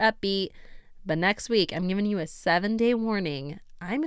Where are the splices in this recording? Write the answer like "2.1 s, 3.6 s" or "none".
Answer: none